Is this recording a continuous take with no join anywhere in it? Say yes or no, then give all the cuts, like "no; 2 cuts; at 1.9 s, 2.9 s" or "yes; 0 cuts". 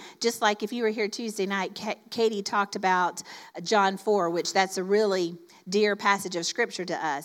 yes; 0 cuts